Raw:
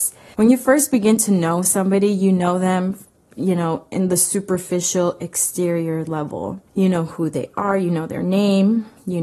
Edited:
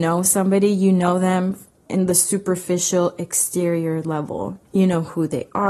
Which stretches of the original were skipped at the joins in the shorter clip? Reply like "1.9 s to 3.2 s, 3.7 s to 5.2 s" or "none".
3.3 s to 3.9 s